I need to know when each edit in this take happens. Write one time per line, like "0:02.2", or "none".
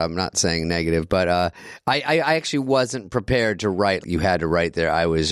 0:04.0